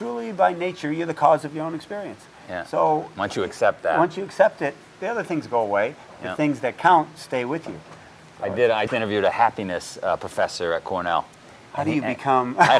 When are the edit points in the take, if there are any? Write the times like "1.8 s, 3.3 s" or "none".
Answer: 8.9 s